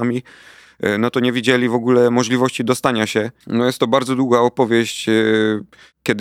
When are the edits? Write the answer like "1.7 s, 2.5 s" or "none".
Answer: 3.4 s